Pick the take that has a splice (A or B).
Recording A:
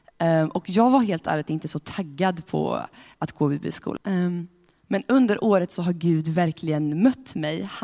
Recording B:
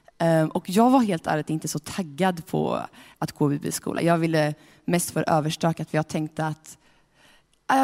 A